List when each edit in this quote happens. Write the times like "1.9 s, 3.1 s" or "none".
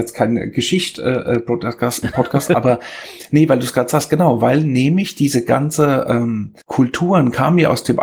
6.6 s